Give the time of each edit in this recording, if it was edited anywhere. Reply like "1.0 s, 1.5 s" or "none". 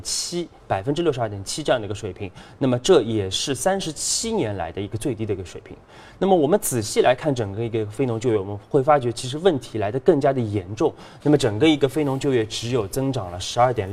11.2 s